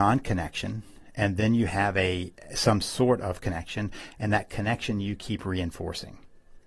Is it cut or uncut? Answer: uncut